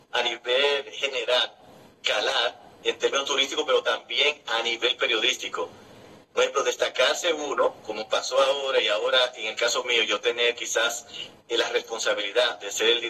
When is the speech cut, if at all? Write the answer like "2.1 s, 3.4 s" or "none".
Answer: none